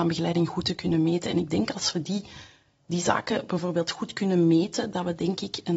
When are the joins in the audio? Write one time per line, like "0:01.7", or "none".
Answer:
none